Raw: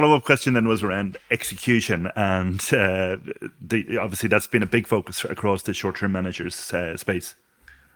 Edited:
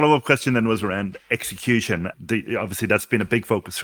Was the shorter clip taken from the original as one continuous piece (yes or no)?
no